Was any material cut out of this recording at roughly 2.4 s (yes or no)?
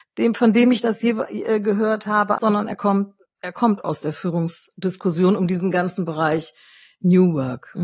yes